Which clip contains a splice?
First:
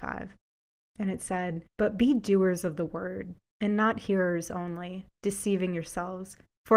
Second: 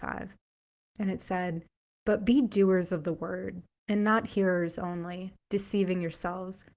first; 1 cut; at 1.7 s

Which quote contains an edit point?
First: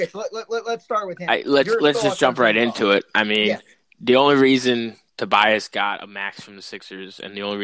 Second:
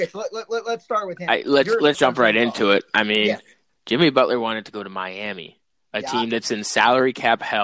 second; 2 cuts; at 1.9 s, 3.7 s

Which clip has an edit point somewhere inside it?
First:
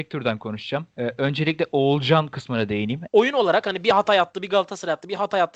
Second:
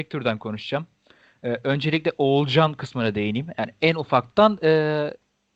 first; 2 cuts; at 0.9 s, 3.1 s

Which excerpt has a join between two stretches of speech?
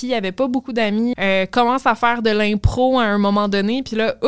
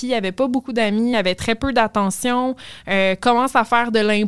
first; 1 cut; at 1.1 s

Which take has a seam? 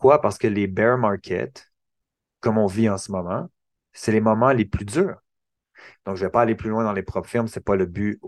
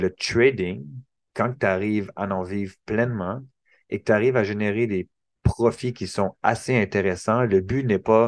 first; 1 cut; at 5.9 s

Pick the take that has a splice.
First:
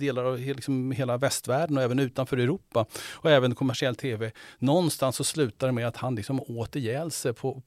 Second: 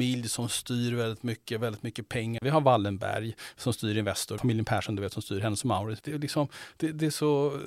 second; 3 cuts; at 2.4 s, 4.4 s, 6.0 s

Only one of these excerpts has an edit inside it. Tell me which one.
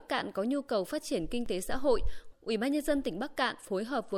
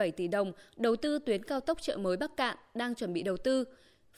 first; 1 cut; at 2.3 s

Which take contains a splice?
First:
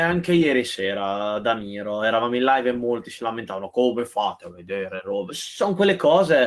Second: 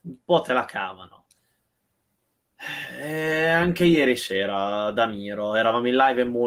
first; 1 cut; at 5.3 s

